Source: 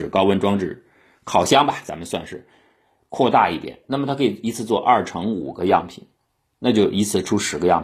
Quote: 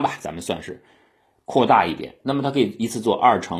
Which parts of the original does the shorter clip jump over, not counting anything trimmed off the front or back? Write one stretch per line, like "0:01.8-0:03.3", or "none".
none